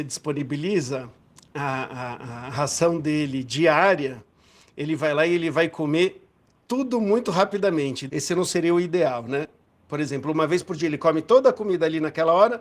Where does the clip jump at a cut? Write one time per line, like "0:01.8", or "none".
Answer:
0:08.1